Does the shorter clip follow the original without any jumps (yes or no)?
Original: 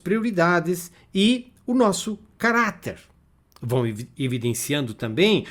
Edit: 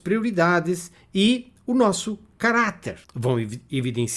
no